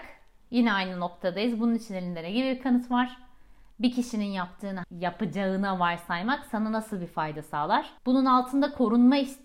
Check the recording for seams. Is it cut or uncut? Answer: cut